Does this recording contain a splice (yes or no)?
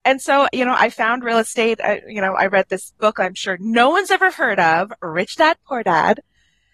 no